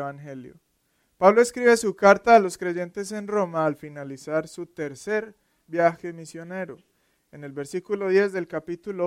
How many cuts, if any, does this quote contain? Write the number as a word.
zero